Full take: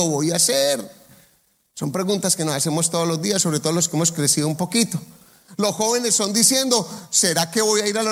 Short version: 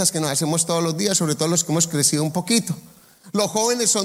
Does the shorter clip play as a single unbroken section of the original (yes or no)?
yes